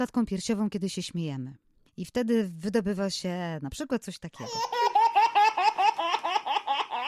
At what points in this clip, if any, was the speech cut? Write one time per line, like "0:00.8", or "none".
0:01.9

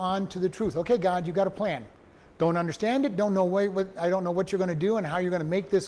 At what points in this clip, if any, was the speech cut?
none

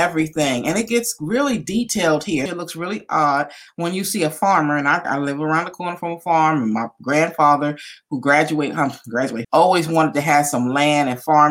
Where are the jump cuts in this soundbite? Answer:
0:02.5
0:05.0
0:09.4

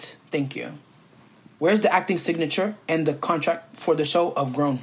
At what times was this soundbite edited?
0:01.6

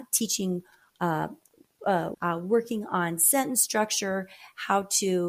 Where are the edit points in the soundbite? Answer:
0:02.1

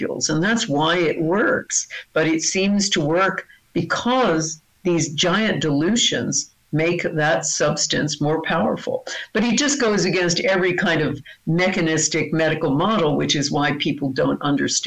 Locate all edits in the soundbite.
none

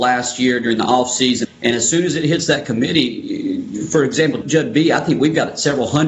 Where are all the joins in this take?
0:01.4
0:04.4

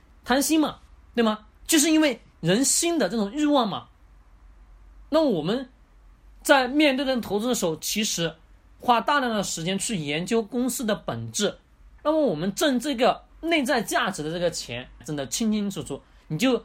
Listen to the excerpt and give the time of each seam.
0:12.0
0:15.0

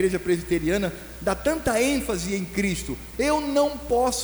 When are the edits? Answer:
0:03.1

